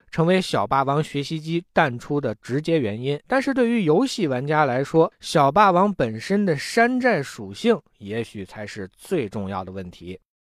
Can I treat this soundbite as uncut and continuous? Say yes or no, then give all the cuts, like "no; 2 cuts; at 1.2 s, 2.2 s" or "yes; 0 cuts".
yes; 0 cuts